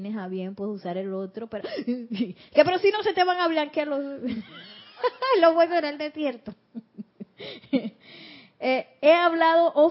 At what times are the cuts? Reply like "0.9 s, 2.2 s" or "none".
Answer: none

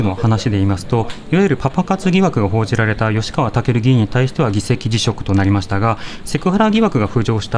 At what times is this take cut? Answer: none

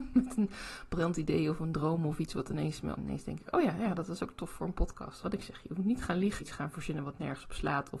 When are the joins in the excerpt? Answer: 3.0 s, 5.2 s, 6.4 s

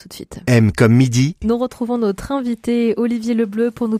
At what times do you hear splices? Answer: 1.4 s

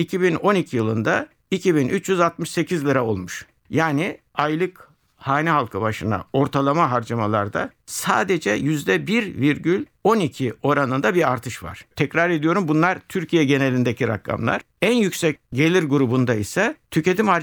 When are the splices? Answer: 11.9 s

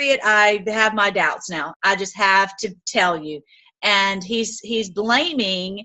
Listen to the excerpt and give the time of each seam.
1.7 s

